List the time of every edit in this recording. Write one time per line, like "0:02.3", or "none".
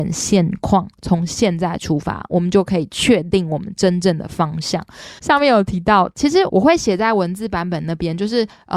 0:05.2
0:06.5